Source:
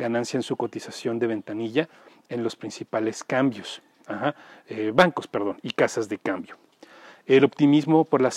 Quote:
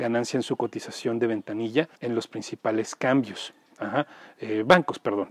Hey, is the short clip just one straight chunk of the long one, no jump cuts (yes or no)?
no